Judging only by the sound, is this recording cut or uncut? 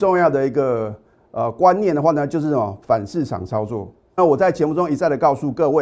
cut